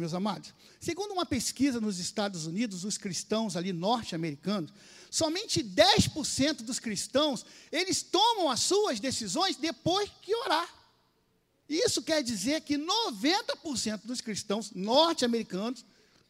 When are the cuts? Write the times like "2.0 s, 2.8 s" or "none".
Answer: 11.6 s